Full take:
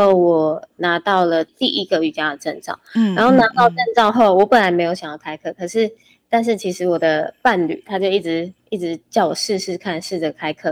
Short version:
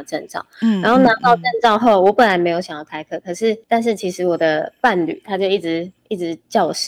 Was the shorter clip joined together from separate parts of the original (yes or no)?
yes